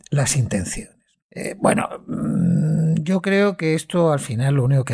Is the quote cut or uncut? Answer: cut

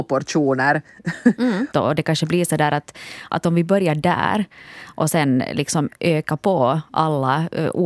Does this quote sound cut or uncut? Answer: cut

